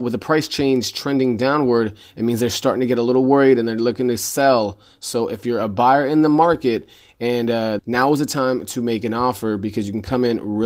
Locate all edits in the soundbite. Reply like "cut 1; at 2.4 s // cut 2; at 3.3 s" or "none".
cut 1; at 7.8 s